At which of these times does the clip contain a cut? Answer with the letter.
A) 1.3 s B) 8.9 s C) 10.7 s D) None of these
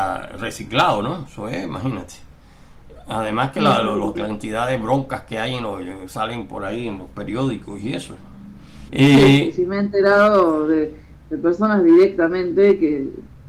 B